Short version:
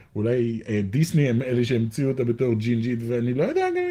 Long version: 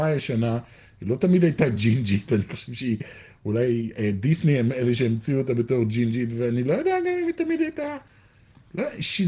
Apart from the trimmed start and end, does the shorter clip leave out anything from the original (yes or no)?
no